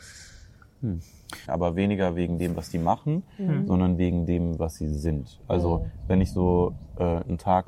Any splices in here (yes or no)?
yes